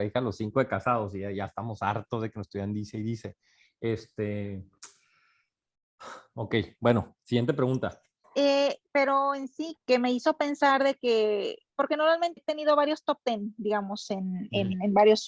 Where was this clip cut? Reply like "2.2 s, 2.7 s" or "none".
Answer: 8.2 s, 9.8 s, 12.4 s